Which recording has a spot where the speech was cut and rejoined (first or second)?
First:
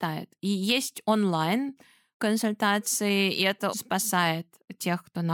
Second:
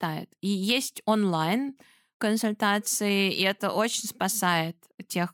first